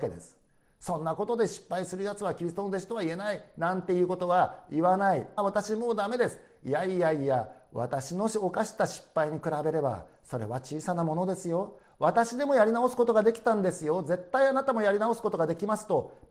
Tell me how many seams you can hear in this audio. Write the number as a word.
one